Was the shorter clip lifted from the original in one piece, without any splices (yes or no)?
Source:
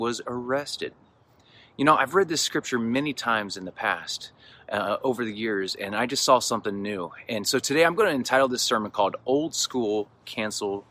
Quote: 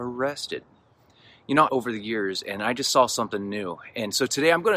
no